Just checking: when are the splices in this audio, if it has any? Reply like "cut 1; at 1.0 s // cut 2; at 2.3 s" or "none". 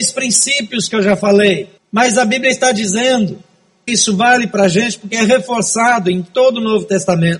cut 1; at 1.8 s // cut 2; at 3.9 s